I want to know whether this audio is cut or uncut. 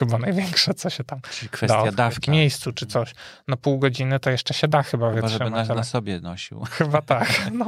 cut